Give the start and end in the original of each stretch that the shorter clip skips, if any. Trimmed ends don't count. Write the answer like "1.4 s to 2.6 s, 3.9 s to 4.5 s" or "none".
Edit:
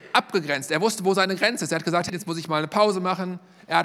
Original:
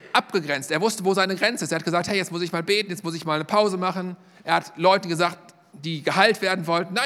2.1 s to 2.9 s